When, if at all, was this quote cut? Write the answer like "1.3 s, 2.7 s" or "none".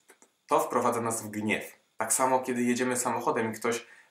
1.9 s

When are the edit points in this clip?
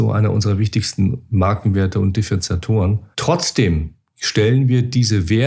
3.1 s

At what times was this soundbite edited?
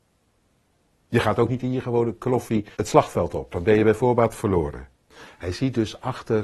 2.7 s, 4.9 s

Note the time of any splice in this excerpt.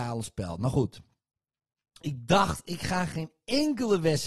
2.0 s

